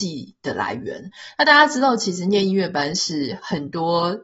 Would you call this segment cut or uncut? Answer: uncut